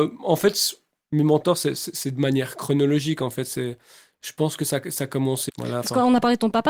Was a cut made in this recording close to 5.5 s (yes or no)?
yes